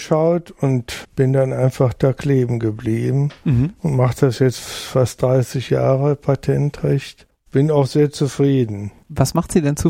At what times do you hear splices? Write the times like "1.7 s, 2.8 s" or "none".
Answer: none